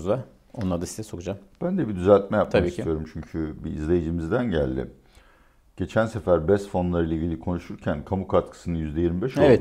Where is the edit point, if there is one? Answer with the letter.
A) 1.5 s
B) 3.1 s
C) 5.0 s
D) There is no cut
D